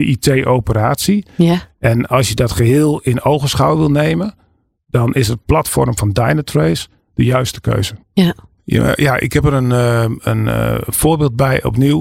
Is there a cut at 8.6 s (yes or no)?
yes